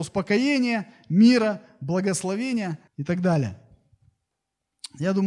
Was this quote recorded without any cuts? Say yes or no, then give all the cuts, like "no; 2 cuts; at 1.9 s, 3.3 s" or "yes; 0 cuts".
no; 1 cut; at 2.9 s